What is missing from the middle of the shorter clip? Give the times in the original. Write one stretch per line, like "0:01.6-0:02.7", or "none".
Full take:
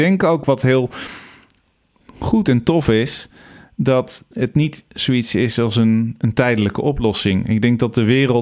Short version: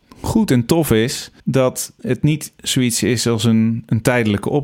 0:03.4-0:03.7